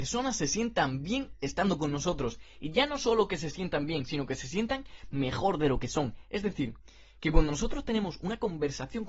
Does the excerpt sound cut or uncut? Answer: uncut